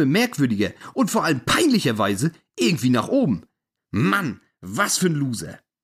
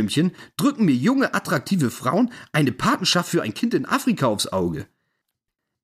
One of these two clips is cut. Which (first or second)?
first